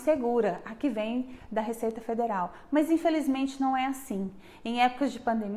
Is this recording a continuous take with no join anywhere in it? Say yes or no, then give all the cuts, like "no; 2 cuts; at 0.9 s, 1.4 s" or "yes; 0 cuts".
yes; 0 cuts